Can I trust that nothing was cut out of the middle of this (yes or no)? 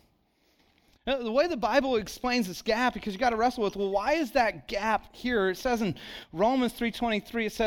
yes